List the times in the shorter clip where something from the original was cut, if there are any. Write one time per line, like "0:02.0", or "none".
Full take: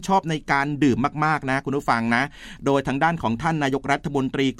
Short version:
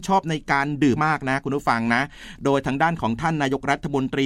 0:01.0